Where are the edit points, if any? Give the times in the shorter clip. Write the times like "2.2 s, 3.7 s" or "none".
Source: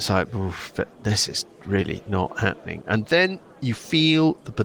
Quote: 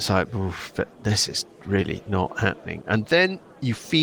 none